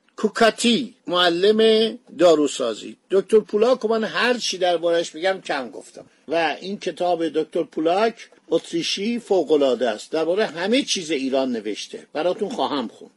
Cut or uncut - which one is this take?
cut